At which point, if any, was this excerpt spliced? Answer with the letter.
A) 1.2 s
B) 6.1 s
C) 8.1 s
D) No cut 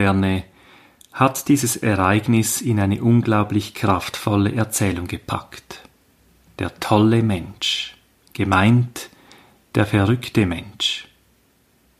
D